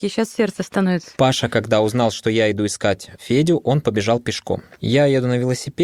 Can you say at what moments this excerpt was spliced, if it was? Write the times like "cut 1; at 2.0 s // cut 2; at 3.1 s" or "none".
none